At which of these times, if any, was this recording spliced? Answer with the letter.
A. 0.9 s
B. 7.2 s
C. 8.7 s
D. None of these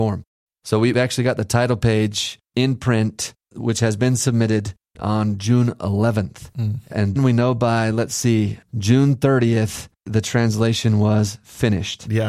B